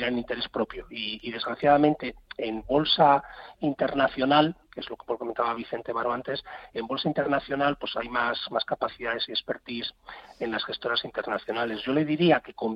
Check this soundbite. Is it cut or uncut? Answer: uncut